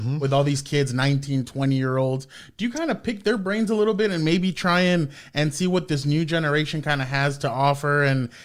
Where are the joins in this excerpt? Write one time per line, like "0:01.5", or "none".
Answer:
none